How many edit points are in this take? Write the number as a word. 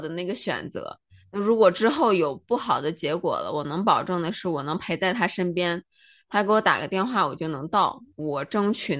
zero